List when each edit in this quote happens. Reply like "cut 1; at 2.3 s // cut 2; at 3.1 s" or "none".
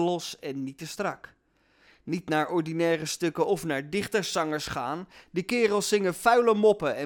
none